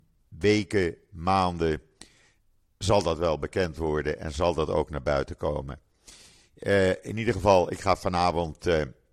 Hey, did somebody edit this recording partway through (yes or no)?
no